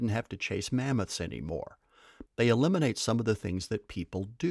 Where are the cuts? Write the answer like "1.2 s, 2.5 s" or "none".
2.3 s